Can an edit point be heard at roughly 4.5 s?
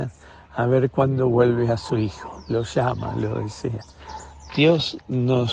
yes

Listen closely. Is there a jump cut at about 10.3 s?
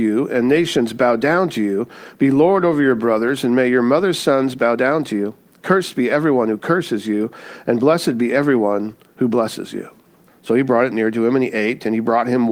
yes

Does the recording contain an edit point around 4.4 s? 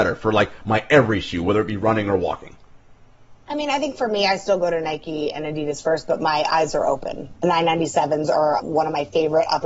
no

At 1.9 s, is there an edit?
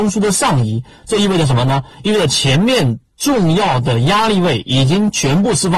no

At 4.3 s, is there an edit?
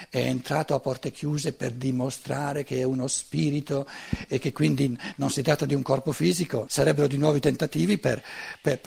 no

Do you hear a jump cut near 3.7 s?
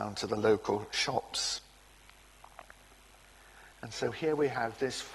yes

